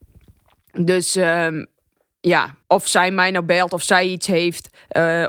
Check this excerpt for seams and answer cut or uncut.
cut